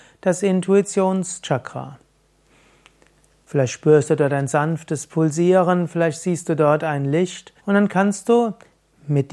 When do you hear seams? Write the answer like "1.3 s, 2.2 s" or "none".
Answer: 3.4 s, 7.6 s